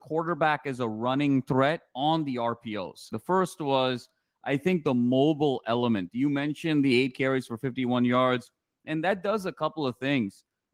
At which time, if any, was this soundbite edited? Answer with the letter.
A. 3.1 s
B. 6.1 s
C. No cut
A